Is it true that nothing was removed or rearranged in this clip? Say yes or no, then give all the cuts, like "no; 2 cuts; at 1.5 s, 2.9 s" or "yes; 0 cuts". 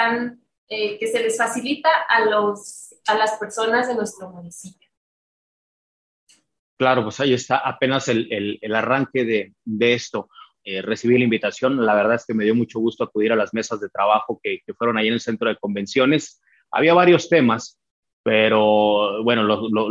no; 1 cut; at 10.6 s